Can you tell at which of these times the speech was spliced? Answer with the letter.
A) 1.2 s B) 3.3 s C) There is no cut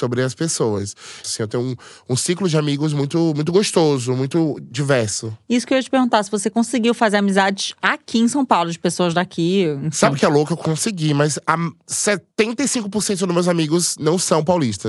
A